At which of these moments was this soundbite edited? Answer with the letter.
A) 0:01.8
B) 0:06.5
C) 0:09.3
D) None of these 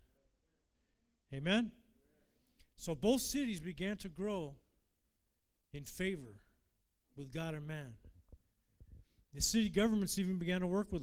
D